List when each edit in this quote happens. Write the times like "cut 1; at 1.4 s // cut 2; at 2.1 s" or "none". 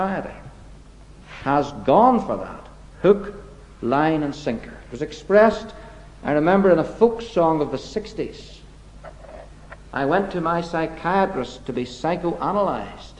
cut 1; at 2.9 s